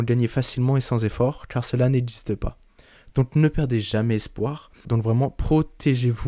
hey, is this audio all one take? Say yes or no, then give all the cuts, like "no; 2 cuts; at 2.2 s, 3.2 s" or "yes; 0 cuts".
no; 2 cuts; at 3.1 s, 4.8 s